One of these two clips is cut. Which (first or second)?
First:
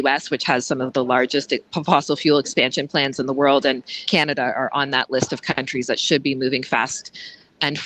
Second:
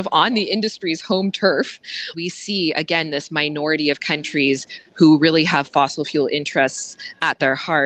second